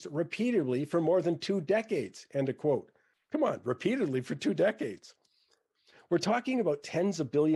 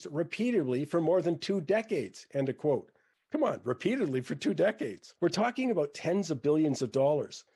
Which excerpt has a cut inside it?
second; 1 cut; at 5.2 s

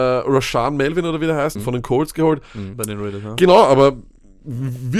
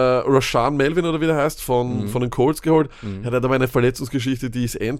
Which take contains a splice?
first; 2 cuts; at 1.6 s, 2.7 s

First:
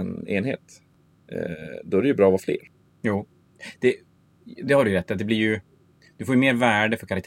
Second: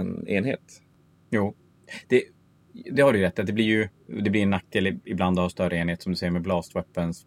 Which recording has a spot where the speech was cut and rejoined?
second; 2 cuts; at 1.2 s, 4.1 s

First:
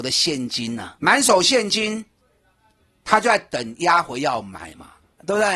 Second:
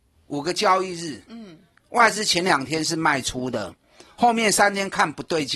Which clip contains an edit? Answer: first; 1 cut; at 1.0 s

